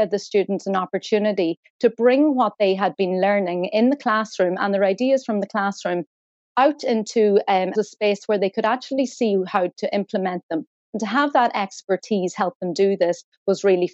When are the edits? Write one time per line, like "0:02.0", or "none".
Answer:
0:07.7